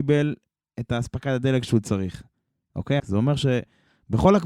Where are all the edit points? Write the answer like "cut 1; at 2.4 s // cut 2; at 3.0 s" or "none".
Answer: cut 1; at 3.0 s